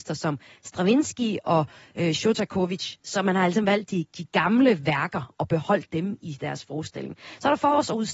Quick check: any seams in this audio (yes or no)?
no